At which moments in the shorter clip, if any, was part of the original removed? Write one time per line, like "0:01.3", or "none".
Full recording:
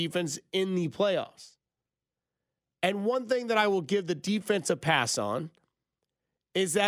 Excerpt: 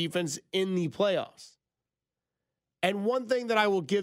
none